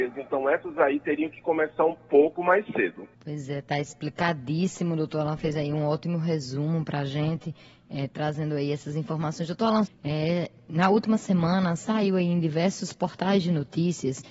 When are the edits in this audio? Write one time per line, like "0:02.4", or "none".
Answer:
0:03.1
0:09.9